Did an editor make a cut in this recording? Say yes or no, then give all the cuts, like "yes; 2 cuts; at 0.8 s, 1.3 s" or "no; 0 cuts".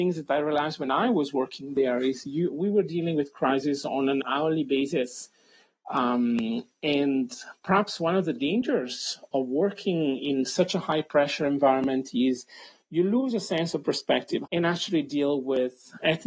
yes; 1 cut; at 14.4 s